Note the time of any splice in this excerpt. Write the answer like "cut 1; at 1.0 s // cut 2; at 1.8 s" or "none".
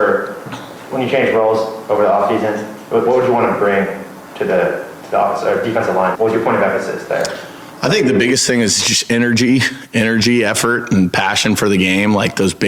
cut 1; at 6.1 s